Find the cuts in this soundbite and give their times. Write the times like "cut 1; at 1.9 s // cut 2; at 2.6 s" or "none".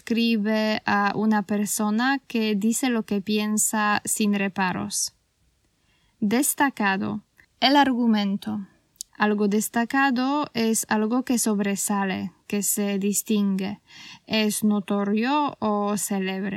cut 1; at 7.4 s // cut 2; at 9.1 s